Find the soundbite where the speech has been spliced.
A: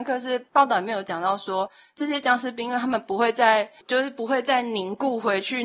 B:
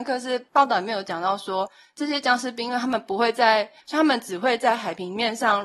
B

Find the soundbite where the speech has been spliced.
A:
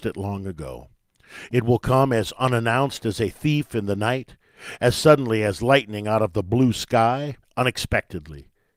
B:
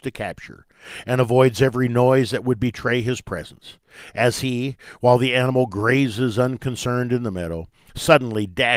A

